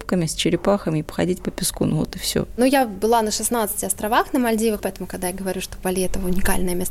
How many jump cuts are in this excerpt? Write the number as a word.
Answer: one